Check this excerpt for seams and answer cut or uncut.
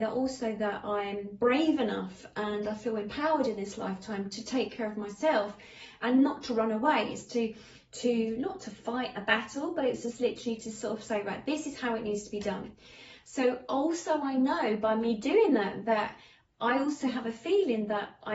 uncut